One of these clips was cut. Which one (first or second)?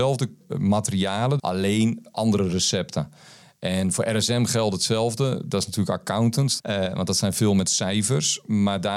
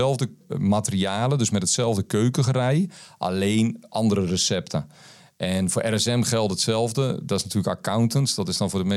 first